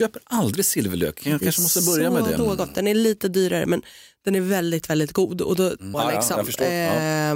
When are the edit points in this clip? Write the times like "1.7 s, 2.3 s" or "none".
2.4 s, 5.9 s